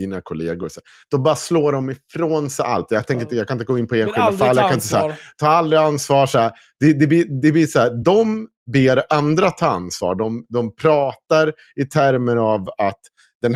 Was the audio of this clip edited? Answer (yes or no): no